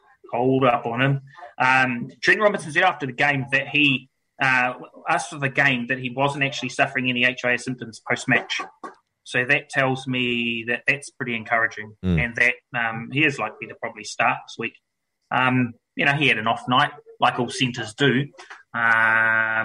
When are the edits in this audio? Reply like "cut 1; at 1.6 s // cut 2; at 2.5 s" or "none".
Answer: none